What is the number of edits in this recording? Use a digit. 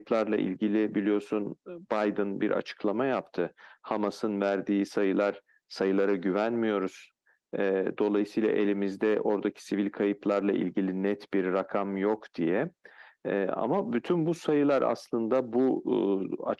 0